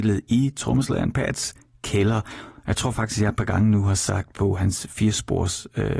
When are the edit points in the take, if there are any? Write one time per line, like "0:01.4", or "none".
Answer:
none

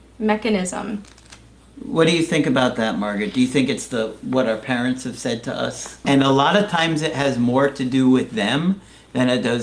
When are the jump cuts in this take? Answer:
0:06.0

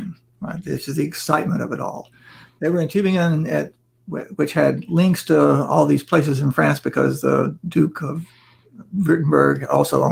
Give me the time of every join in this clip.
none

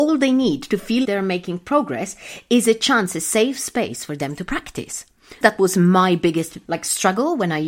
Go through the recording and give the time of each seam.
0:01.0
0:05.4
0:06.7

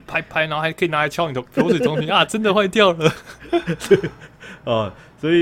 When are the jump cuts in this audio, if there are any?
0:01.4

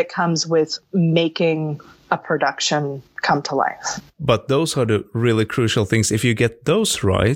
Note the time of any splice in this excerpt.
none

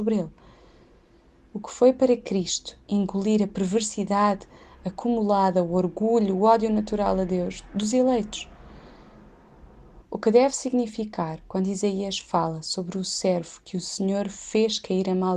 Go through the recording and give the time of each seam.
0:10.0

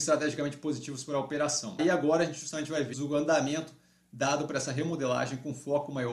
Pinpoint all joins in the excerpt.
0:01.8
0:02.9

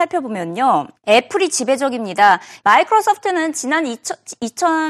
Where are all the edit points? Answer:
0:01.0
0:02.6

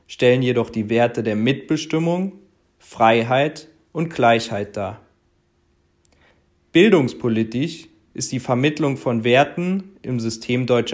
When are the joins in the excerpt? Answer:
none

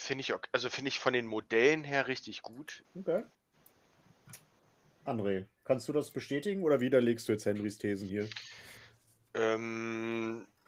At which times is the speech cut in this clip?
0:02.8

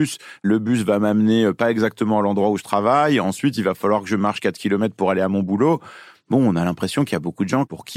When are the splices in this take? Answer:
none

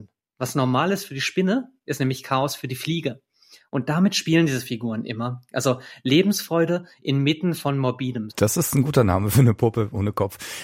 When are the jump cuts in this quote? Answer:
0:08.3

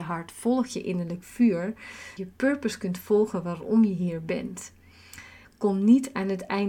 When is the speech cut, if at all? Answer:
0:02.2
0:05.4

